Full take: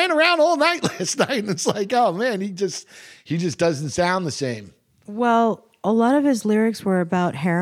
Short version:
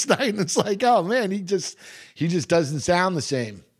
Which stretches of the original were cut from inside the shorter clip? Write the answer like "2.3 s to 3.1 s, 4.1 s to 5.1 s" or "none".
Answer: none